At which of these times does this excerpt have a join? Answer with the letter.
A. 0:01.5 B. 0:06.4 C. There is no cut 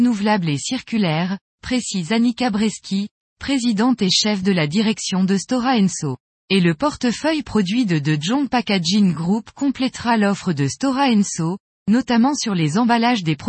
B